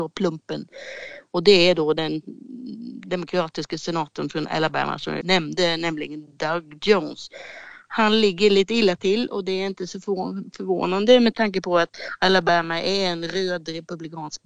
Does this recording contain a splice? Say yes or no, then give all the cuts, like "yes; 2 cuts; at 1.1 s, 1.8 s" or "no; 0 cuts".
yes; 1 cut; at 5.2 s